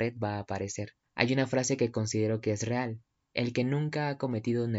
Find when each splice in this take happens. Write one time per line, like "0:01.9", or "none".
none

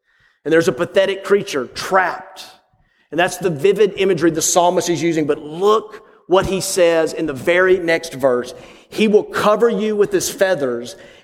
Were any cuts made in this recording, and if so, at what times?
none

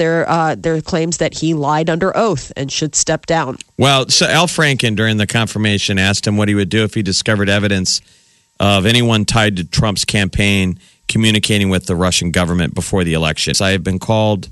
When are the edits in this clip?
0:04.3
0:13.5

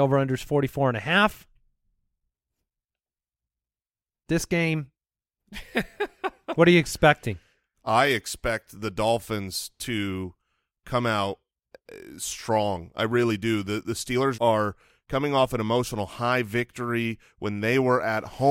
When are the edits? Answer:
0:14.3

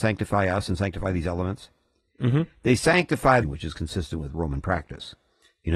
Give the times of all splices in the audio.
0:03.4

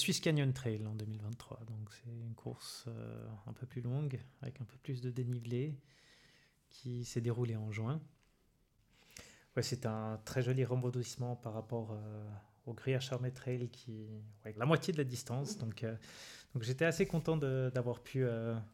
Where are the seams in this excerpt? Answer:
0:14.6

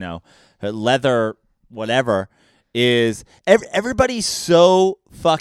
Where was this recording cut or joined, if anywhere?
none

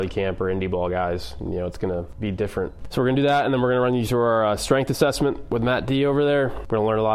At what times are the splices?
0:02.8

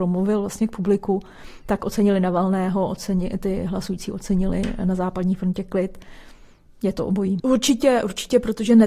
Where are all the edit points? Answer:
0:07.4

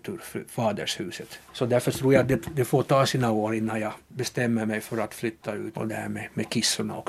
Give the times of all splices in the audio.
0:01.5
0:05.7

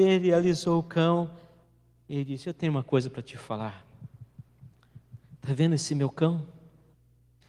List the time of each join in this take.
none

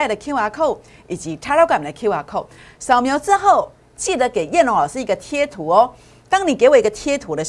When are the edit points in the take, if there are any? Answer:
none

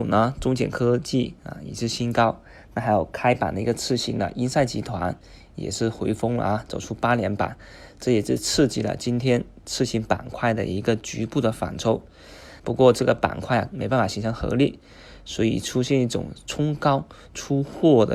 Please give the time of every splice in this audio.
0:12.6
0:13.7

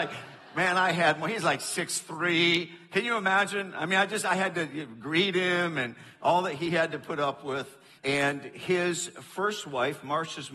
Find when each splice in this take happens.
0:08.0

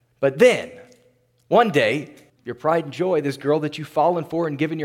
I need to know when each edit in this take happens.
0:02.3

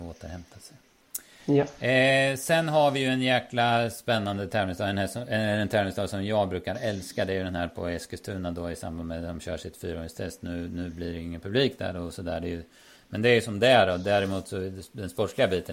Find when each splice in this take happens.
none

